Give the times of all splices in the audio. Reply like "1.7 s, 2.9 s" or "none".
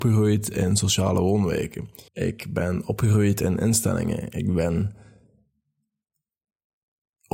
2.1 s